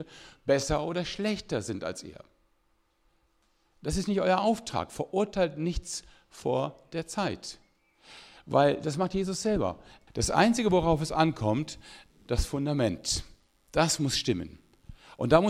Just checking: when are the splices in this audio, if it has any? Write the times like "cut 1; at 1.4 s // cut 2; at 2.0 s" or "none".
cut 1; at 10.1 s // cut 2; at 12.1 s